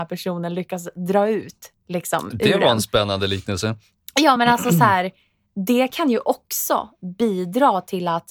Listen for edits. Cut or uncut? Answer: uncut